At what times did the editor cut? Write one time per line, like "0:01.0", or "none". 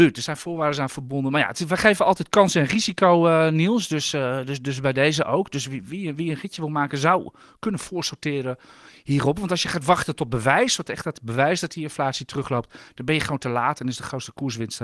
none